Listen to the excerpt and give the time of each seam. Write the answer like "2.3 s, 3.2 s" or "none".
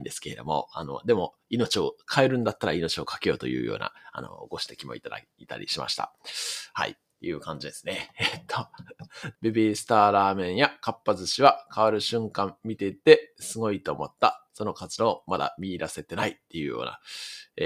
9.3 s